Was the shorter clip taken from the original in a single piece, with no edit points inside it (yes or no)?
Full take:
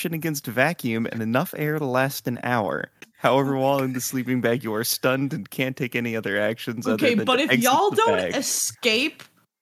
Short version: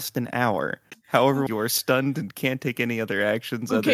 no